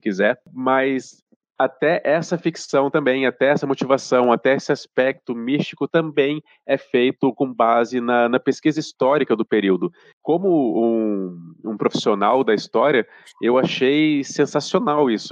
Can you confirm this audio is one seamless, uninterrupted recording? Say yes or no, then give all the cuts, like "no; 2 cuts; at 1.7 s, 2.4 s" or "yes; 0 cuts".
yes; 0 cuts